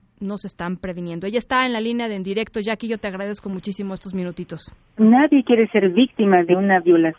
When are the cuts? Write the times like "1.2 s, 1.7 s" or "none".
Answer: 5.0 s